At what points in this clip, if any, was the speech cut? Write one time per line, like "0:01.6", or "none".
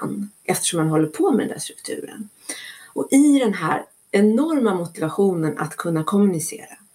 0:02.9